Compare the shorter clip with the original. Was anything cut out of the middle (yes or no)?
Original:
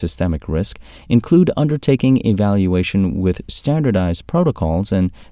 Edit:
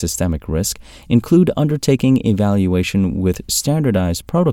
no